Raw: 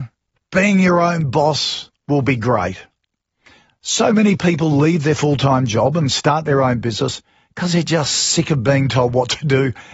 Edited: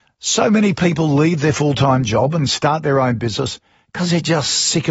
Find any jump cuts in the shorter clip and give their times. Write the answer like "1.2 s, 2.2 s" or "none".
none